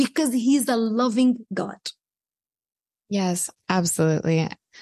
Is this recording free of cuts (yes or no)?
yes